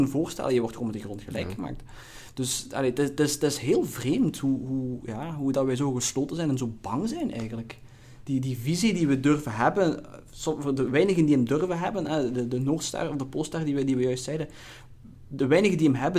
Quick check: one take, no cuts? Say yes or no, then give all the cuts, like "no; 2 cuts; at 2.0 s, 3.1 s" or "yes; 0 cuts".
yes; 0 cuts